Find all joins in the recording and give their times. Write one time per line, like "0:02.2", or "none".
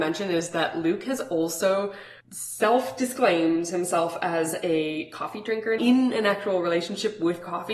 0:02.2
0:05.8